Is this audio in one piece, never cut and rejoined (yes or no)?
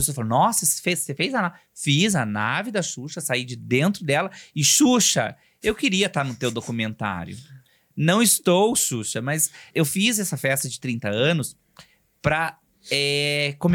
no